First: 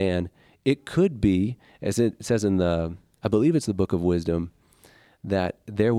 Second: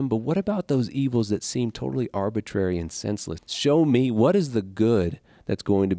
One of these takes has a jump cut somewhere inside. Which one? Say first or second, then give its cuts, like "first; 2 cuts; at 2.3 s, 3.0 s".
second; 1 cut; at 3.4 s